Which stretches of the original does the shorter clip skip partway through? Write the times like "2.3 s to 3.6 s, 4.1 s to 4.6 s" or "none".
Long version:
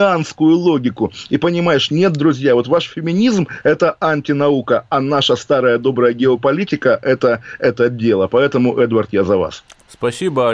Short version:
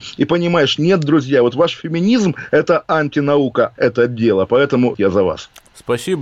4.9 s to 7.6 s, 8.8 s to 9.1 s